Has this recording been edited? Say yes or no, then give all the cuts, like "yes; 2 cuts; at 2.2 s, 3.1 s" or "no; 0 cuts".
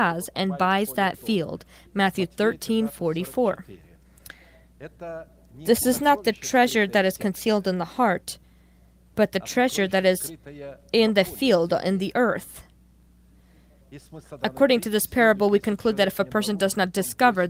no; 0 cuts